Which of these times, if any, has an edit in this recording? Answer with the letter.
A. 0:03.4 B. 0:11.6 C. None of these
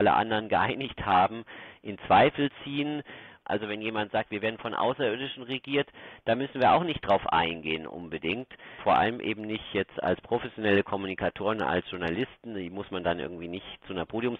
A